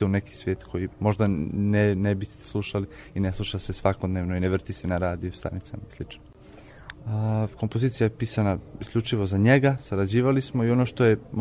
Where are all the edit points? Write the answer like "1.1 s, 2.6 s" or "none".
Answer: 6.9 s